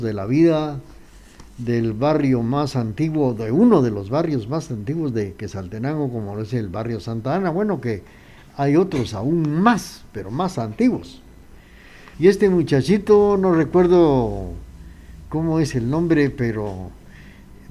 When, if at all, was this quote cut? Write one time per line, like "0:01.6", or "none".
0:12.1

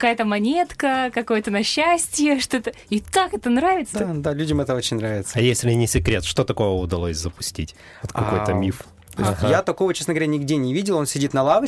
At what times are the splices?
0:03.9
0:09.2

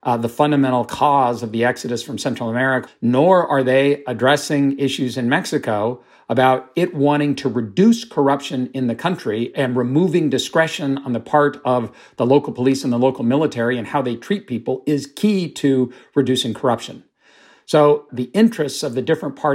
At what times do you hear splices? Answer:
0:02.9
0:18.1

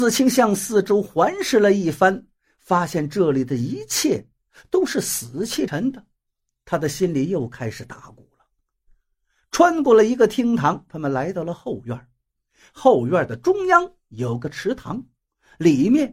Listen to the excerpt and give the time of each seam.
0:05.7

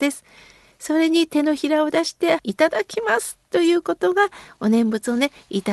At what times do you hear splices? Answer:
0:02.4

